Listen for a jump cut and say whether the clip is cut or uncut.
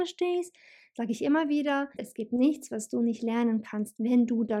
cut